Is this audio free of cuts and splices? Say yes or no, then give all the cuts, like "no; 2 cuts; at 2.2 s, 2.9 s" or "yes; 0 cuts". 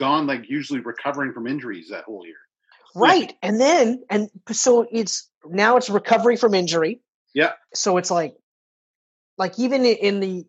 no; 1 cut; at 7.7 s